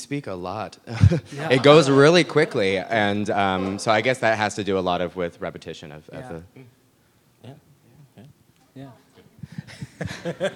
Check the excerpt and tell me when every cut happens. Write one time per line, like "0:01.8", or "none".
none